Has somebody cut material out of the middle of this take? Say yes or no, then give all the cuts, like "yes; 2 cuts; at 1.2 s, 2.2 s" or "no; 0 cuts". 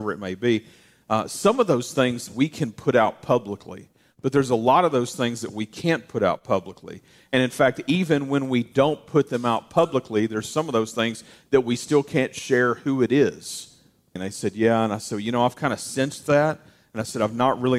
yes; 1 cut; at 14.2 s